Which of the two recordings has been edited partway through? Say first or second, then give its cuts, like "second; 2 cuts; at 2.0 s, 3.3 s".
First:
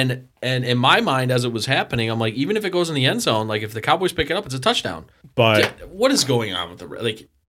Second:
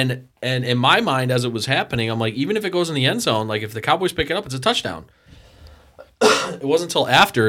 first; 1 cut; at 5.2 s